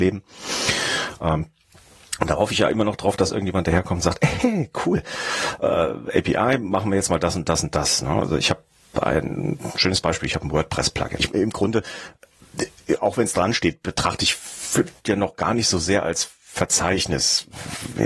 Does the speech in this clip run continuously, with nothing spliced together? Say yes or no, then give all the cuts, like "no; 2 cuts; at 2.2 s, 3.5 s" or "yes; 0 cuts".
no; 1 cut; at 11.2 s